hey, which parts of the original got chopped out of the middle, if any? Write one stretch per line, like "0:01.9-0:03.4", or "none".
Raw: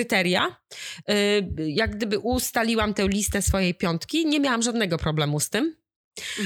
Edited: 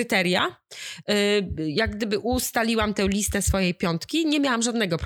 none

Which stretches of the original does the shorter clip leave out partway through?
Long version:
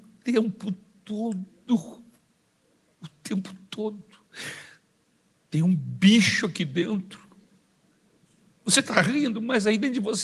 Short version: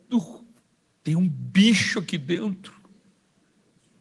0:02.6-0:05.5

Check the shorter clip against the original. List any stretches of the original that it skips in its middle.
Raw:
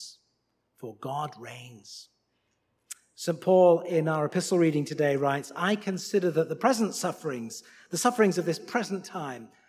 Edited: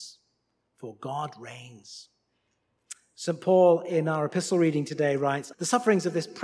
0:05.5-0:07.8

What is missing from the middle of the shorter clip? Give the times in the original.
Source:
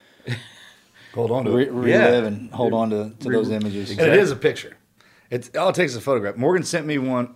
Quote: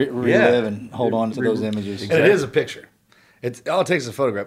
0:02.9-0:03.2

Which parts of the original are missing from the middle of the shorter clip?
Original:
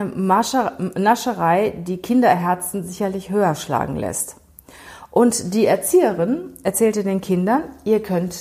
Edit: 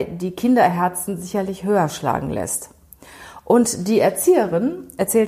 none

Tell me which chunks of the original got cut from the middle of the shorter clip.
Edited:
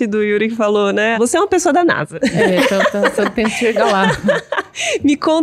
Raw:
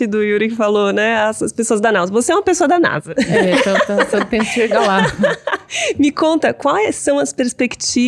0:01.1-0:02.1

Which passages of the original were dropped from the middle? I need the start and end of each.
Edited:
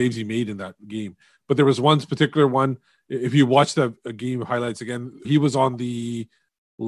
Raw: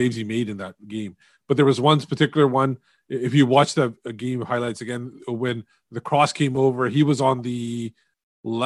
0:05.2-0:06.9

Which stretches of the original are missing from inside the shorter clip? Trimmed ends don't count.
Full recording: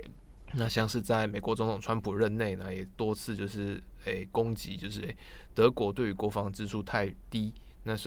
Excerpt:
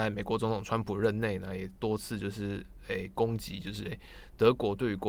none

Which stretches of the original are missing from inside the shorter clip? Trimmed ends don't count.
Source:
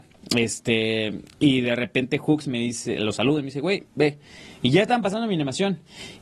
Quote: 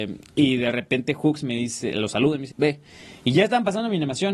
0:03.5-0:03.9

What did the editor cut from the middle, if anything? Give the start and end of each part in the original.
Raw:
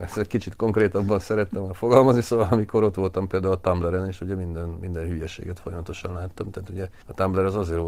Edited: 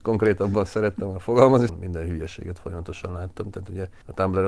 0:02.2-0:04.7

